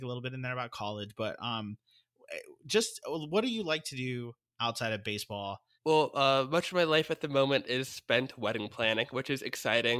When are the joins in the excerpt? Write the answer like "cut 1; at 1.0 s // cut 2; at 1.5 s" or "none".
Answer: cut 1; at 5.8 s